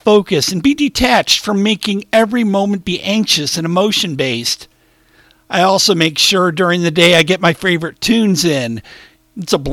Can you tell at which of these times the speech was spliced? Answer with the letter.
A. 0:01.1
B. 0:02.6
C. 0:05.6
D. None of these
D